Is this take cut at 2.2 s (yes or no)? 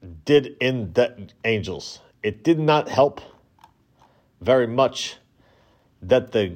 no